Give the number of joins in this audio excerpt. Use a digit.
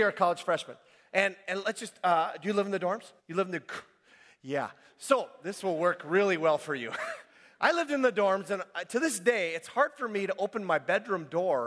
1